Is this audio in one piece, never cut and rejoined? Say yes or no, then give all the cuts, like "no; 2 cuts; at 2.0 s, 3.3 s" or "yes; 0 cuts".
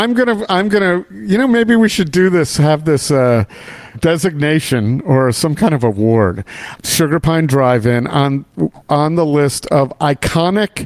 no; 2 cuts; at 3.9 s, 6.8 s